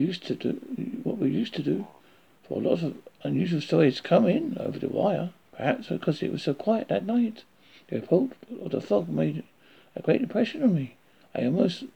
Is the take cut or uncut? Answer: cut